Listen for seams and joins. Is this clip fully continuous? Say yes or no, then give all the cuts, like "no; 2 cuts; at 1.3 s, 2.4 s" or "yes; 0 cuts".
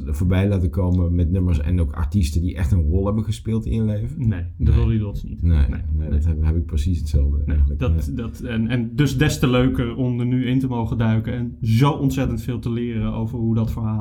yes; 0 cuts